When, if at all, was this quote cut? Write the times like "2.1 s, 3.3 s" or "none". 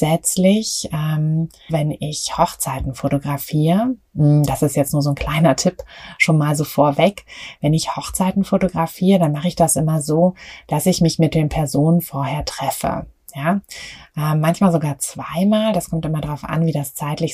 1.7 s